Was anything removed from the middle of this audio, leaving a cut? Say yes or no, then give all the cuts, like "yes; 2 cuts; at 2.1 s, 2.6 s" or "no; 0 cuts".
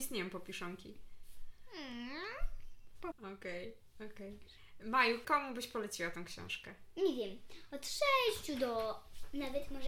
yes; 2 cuts; at 3.1 s, 5.2 s